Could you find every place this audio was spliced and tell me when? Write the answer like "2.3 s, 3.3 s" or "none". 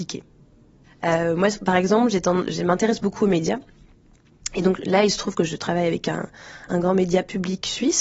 6.7 s